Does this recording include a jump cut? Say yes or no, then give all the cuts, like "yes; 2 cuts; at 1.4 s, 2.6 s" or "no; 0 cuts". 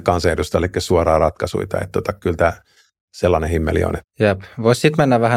yes; 1 cut; at 4.0 s